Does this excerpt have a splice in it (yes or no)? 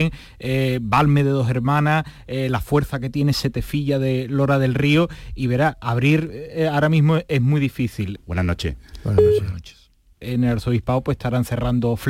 yes